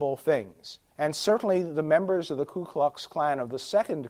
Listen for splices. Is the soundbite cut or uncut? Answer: cut